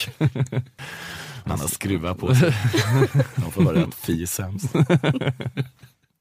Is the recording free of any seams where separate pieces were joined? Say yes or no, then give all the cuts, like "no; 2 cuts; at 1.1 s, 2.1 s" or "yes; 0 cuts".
yes; 0 cuts